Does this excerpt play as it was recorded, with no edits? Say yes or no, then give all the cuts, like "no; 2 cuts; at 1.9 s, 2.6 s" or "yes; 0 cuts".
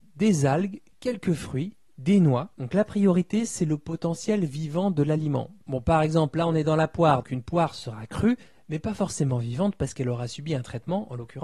no; 1 cut; at 7.2 s